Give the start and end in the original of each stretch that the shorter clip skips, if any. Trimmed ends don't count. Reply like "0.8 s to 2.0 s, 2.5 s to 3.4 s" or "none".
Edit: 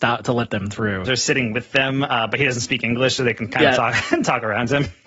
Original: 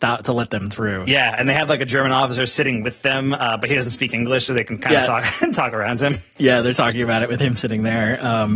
1.1 s to 2.4 s